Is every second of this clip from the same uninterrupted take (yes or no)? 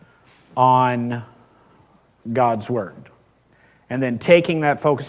yes